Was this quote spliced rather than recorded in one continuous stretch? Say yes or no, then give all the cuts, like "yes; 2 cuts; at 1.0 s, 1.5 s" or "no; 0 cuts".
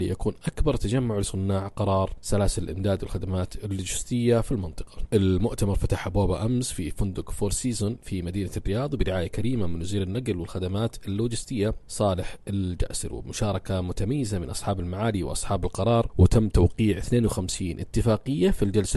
no; 0 cuts